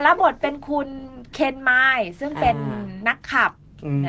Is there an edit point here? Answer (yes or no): no